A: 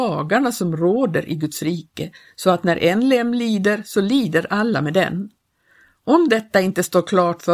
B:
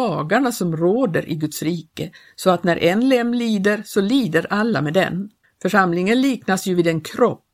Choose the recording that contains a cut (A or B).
B